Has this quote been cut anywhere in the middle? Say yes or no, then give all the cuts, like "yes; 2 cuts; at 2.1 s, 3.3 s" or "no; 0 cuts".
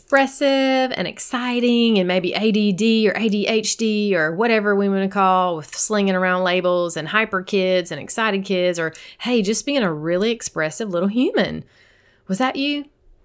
no; 0 cuts